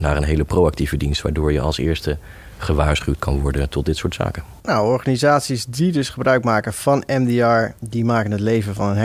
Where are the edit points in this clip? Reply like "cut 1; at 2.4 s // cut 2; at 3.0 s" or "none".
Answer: cut 1; at 4.6 s // cut 2; at 7.8 s